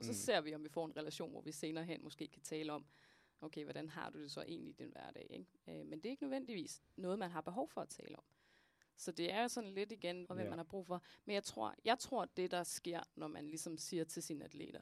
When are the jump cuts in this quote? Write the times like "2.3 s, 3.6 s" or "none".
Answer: 10.2 s